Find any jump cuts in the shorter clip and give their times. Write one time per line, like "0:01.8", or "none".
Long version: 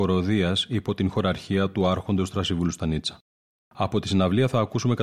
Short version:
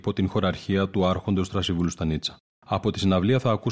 0:02.5

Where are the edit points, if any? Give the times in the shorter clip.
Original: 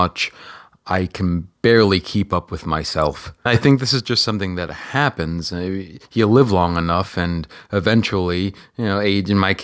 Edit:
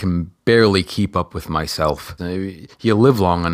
0:02.2

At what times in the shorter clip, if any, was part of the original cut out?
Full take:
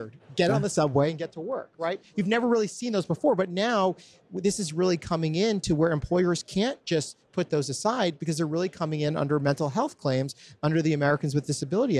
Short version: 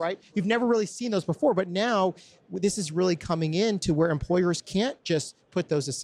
none

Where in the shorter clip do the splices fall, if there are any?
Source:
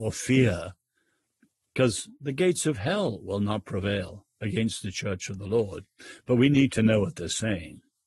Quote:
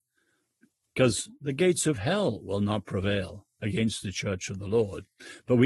none

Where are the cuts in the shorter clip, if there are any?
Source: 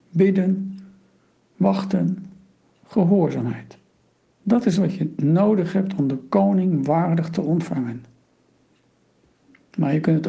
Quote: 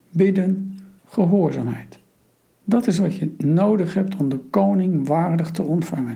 0:01.0

